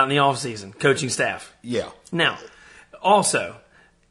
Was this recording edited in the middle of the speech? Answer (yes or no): no